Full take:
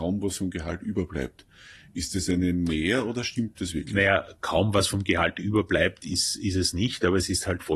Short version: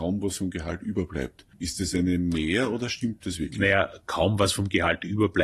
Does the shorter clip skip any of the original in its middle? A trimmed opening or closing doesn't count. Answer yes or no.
yes